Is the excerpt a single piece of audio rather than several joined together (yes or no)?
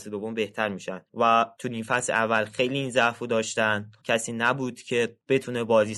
no